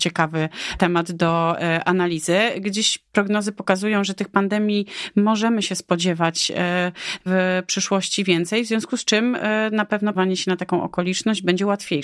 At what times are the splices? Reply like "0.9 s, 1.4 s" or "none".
10.1 s